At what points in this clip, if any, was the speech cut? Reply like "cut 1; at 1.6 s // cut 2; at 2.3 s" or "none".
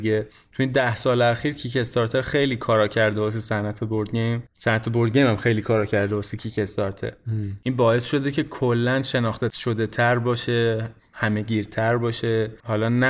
cut 1; at 4.5 s